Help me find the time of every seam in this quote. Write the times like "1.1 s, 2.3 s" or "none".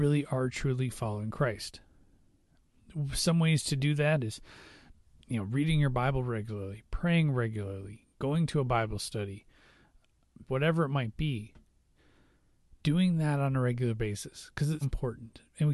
10.5 s, 14.8 s